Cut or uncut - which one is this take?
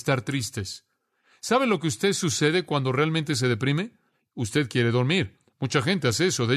uncut